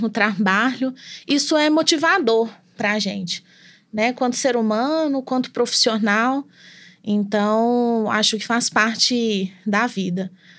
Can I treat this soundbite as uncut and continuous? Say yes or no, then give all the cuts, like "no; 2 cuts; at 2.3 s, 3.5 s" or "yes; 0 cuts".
yes; 0 cuts